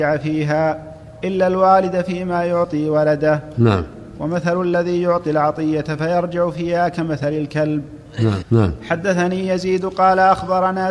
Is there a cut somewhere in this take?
yes; 1 cut; at 8.4 s

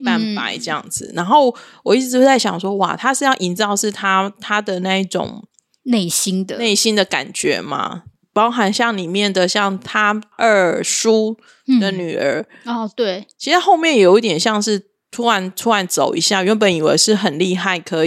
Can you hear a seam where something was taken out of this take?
no; 0 cuts

